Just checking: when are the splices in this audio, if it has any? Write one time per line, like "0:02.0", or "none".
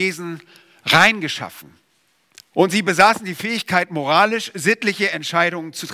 0:02.5